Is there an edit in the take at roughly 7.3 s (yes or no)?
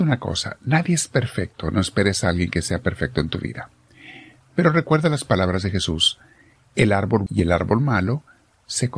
yes